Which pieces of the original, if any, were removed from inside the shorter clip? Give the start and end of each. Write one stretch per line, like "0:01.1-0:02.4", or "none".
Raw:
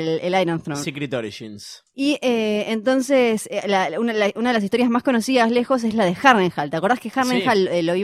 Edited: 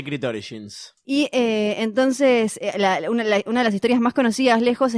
none